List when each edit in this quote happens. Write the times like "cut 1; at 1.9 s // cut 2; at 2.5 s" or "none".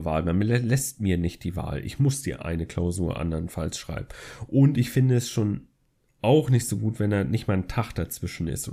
none